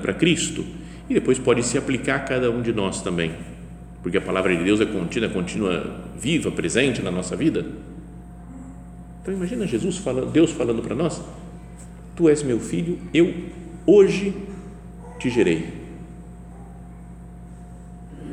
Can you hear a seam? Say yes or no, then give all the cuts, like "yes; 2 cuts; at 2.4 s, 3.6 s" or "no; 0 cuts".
no; 0 cuts